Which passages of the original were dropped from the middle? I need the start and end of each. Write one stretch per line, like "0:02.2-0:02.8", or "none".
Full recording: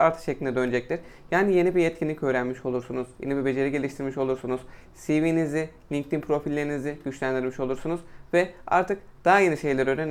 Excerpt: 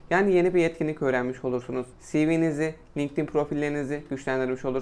0:03.1-0:04.9